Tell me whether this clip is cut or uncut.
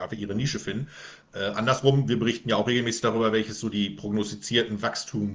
uncut